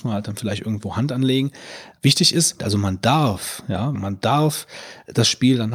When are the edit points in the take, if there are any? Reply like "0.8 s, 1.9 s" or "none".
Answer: 2.6 s, 3.9 s